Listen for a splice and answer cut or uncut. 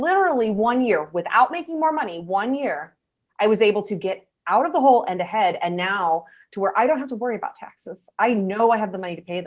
uncut